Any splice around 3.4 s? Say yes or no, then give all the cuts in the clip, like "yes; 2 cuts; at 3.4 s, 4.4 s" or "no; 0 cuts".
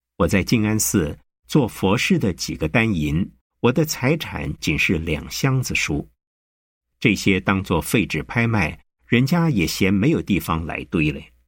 yes; 1 cut; at 3.4 s